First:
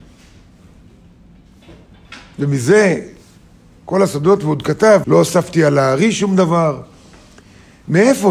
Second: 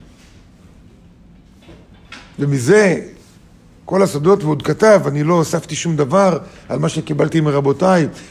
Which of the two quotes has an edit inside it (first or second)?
first